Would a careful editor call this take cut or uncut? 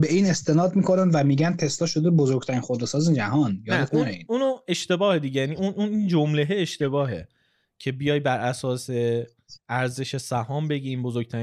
uncut